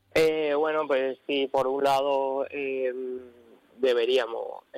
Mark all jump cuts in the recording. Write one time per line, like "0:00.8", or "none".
none